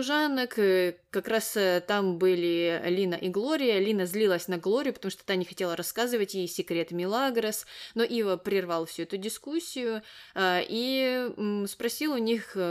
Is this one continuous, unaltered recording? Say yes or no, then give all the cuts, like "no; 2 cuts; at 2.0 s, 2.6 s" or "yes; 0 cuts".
yes; 0 cuts